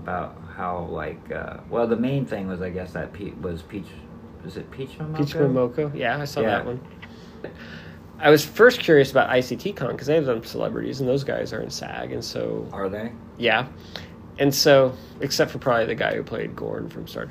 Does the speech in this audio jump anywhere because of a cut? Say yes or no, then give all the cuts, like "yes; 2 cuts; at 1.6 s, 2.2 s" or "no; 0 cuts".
yes; 1 cut; at 7.4 s